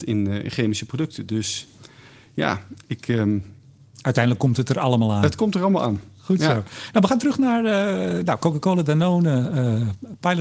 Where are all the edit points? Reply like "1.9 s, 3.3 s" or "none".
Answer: none